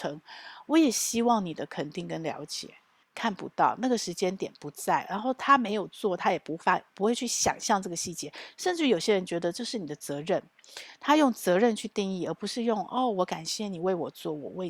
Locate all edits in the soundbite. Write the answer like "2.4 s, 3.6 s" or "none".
3.0 s